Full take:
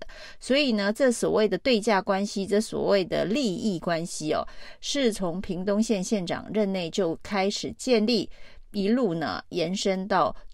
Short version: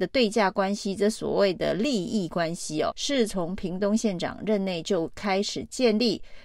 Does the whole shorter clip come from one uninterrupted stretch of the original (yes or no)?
no